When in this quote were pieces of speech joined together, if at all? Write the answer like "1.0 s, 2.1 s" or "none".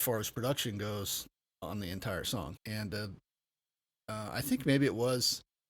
2.6 s